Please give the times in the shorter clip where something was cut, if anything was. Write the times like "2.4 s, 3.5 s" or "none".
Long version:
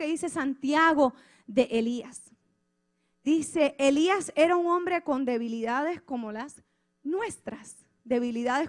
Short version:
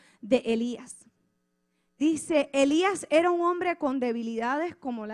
none